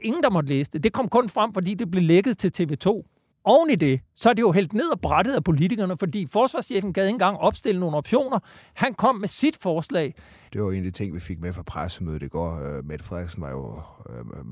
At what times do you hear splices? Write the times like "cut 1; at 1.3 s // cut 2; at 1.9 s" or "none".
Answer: cut 1; at 3.3 s // cut 2; at 10.5 s